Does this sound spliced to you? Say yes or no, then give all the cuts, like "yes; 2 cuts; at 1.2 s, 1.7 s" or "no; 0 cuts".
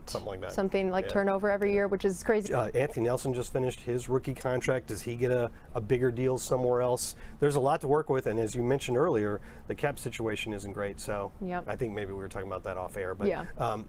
yes; 1 cut; at 2.4 s